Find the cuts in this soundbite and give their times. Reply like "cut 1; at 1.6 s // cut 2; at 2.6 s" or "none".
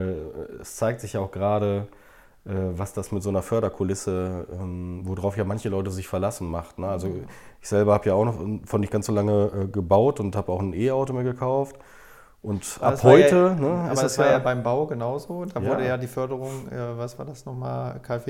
none